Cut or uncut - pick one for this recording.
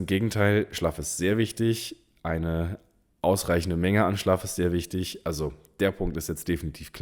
uncut